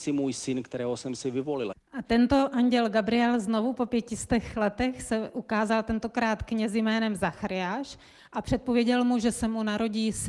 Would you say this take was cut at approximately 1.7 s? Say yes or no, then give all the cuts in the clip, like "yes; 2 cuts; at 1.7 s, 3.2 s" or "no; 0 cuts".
yes; 1 cut; at 1.7 s